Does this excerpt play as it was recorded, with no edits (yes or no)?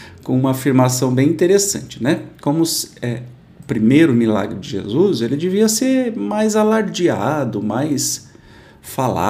yes